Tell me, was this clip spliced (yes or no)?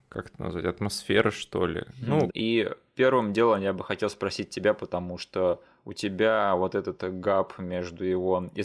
yes